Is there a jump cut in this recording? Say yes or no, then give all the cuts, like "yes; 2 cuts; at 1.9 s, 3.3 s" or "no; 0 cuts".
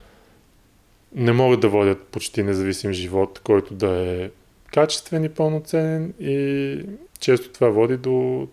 yes; 1 cut; at 7.1 s